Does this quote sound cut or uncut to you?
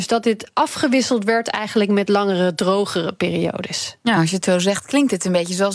uncut